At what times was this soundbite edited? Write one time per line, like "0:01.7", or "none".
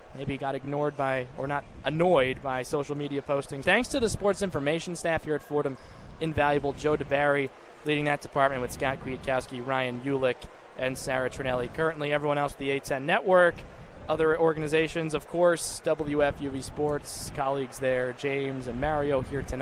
0:03.6